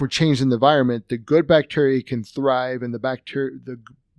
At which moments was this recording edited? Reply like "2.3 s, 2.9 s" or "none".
none